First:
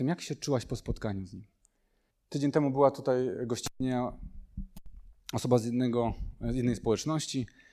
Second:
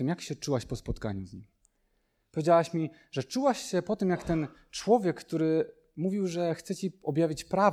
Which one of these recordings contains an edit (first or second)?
first